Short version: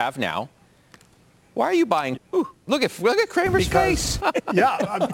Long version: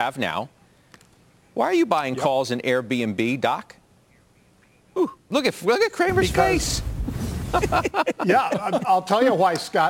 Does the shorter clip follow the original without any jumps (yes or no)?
no